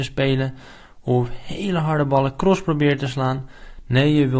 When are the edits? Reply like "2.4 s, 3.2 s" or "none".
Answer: none